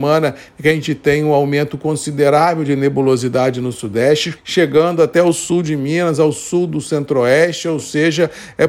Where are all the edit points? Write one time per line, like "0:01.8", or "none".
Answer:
0:04.3